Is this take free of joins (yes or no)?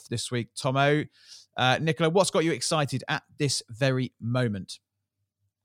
yes